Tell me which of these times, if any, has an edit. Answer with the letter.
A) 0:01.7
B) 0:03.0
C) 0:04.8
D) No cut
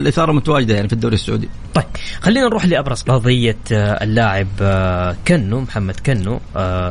B